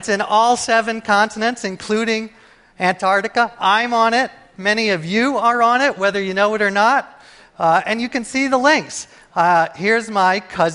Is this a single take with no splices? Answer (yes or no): yes